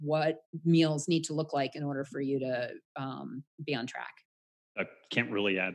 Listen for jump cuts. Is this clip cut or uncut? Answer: cut